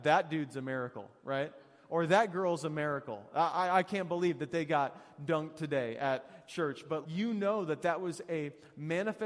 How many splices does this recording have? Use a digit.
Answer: 1